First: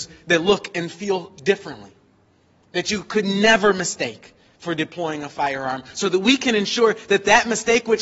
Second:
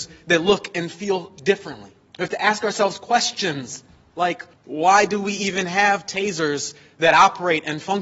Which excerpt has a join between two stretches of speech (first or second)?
second